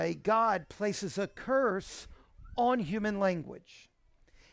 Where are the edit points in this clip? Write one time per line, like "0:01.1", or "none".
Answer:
none